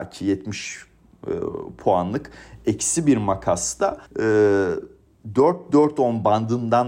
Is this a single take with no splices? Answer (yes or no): no